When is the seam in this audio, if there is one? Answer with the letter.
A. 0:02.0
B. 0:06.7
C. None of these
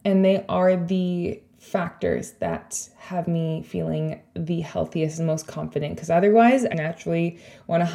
B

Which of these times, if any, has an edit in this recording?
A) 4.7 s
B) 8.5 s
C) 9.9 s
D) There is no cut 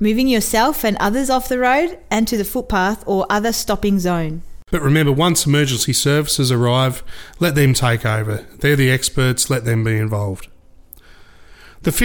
A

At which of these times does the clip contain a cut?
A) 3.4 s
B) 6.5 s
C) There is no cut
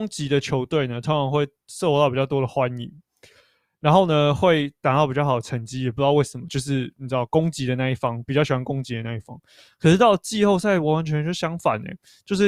C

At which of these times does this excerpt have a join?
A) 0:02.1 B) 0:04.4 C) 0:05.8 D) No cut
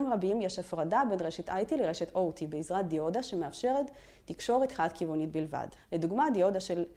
C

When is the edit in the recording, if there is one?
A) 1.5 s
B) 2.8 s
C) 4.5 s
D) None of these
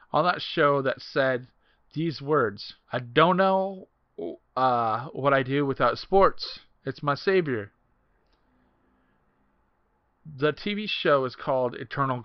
B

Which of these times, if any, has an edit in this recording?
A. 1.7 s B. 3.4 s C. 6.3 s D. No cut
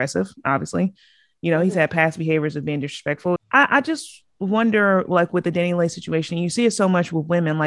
B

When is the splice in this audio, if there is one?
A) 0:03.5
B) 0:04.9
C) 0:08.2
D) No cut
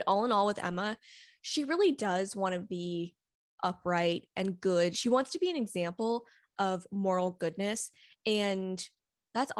D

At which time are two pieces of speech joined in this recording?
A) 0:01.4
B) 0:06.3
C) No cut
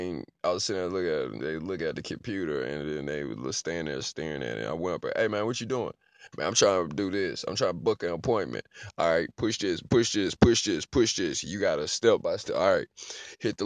A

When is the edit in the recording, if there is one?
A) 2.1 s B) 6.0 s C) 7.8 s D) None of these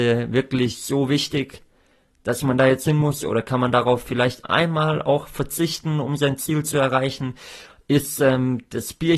D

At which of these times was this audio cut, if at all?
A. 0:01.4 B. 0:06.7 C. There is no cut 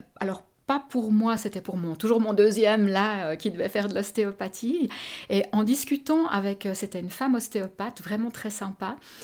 C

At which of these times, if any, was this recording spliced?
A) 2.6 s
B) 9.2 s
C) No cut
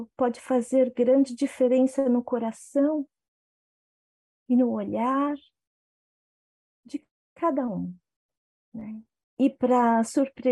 B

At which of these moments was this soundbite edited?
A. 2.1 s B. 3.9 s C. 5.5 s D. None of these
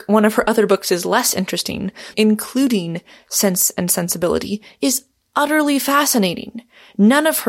A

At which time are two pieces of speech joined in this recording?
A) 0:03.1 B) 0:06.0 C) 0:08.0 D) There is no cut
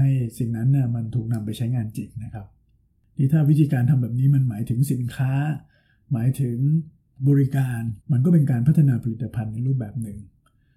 C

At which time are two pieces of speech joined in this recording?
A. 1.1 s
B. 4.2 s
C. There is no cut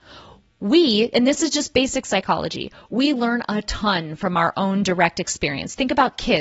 C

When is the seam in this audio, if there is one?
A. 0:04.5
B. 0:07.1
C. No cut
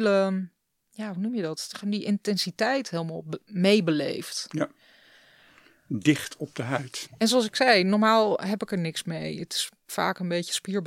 B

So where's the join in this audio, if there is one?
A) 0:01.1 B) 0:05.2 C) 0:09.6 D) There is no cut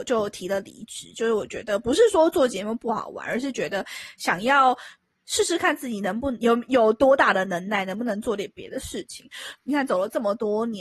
C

